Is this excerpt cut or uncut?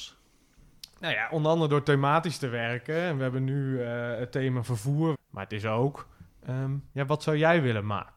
cut